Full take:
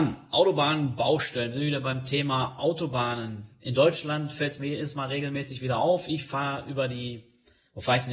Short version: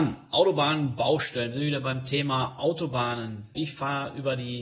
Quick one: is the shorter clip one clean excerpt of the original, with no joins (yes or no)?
no